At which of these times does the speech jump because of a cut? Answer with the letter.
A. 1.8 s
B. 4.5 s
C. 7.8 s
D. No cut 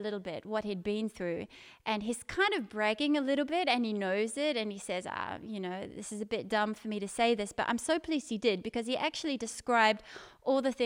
D